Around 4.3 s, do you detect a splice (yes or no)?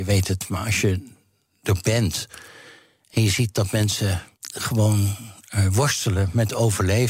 yes